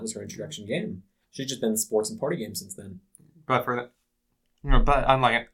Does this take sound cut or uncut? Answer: uncut